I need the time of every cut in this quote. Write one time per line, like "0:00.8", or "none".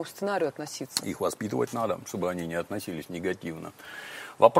none